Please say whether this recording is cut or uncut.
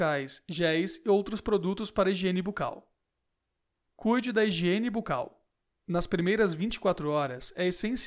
uncut